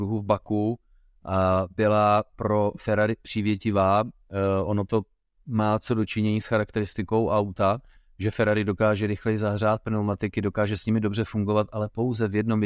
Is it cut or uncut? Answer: uncut